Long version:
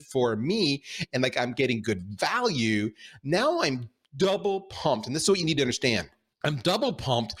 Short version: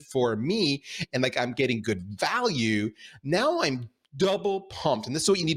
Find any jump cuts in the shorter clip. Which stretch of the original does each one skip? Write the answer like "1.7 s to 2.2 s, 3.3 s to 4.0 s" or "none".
none